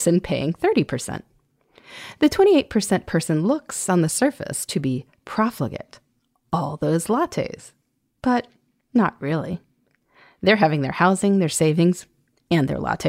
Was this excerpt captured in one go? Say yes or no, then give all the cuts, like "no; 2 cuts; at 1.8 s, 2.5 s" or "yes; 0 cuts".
yes; 0 cuts